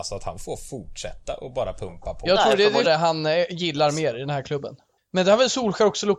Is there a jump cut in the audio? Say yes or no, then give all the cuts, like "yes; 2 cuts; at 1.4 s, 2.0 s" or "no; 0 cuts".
yes; 2 cuts; at 2.8 s, 5.0 s